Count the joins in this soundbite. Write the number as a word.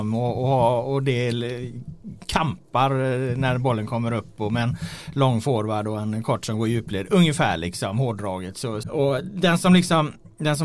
one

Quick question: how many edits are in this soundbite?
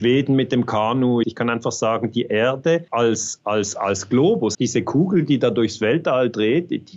three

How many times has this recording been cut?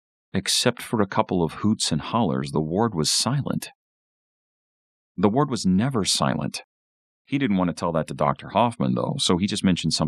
one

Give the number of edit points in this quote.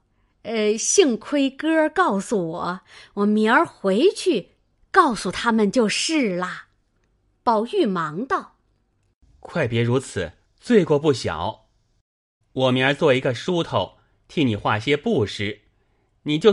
three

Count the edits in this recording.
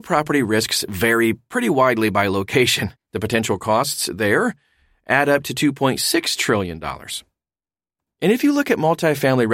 one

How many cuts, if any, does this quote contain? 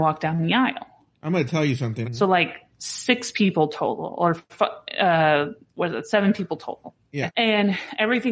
two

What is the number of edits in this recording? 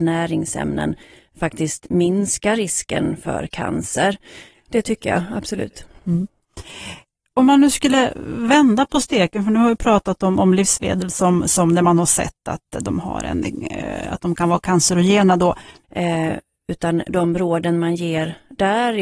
two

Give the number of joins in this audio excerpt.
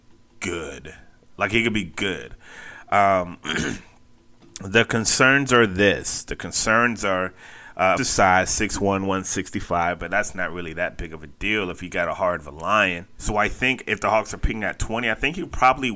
two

